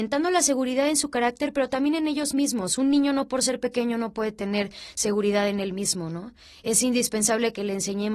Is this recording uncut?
yes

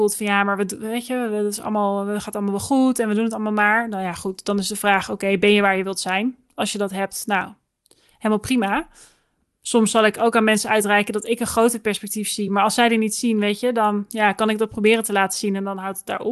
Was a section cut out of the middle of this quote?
no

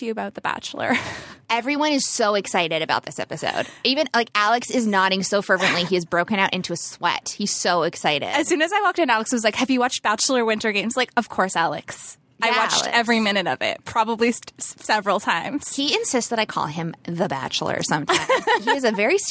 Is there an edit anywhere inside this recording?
no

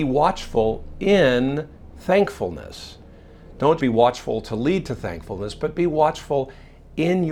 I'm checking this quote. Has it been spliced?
yes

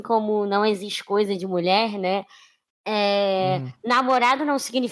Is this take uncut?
yes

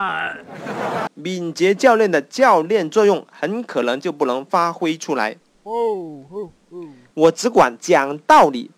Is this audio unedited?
no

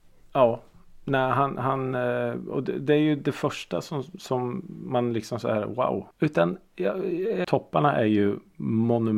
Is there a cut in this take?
yes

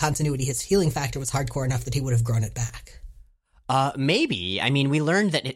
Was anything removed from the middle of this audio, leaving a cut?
no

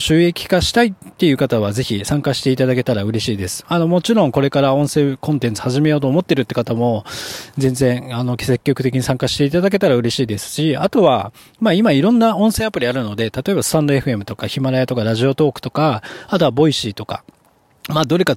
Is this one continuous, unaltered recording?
yes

